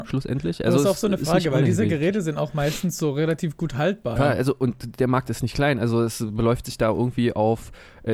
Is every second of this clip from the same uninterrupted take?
no; 1 cut; at 4.2 s

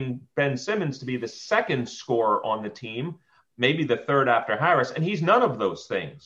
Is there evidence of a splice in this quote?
no; 0 cuts

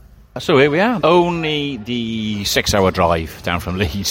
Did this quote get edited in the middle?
yes; 1 cut; at 1.0 s

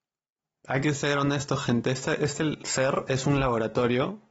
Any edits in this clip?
no; 0 cuts

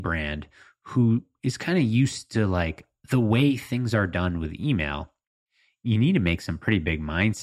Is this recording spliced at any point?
no; 0 cuts

